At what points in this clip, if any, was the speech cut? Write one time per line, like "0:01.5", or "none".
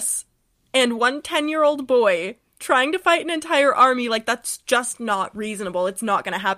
none